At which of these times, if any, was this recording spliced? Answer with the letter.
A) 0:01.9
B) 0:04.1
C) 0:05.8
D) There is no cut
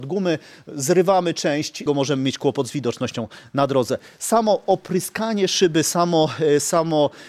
A